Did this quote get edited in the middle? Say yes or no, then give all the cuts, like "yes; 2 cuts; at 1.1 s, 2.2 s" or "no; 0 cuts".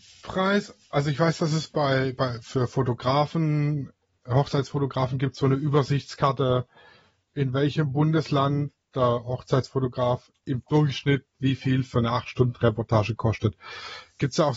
no; 0 cuts